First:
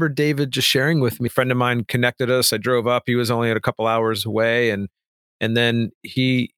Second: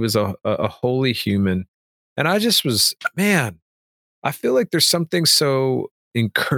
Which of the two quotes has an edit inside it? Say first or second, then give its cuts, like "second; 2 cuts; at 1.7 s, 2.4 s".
first; 1 cut; at 1.3 s